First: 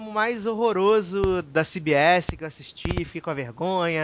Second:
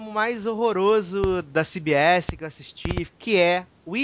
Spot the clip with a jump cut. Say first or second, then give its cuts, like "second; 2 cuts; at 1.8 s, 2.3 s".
second; 1 cut; at 3.1 s